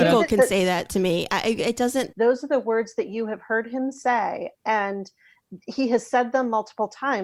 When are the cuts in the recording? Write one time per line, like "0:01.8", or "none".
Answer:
0:02.1
0:04.5